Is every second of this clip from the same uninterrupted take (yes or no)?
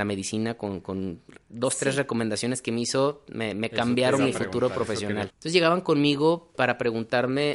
no